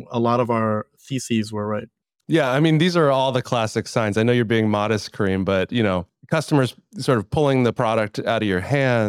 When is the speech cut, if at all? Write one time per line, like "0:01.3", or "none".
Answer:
none